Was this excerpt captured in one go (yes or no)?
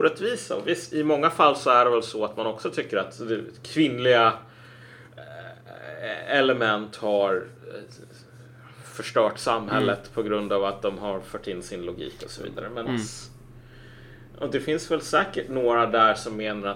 no